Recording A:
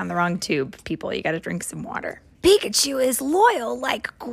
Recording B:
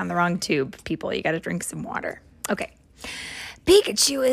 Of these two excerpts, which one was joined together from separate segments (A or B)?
A